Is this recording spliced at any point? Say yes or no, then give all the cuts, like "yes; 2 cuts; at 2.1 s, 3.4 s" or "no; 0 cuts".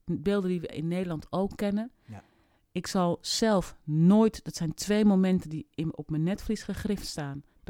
no; 0 cuts